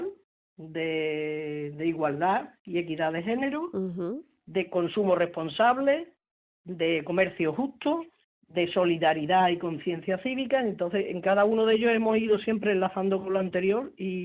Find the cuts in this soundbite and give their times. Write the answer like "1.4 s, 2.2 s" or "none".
8.2 s